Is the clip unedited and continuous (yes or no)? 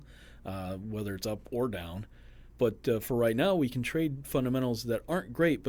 no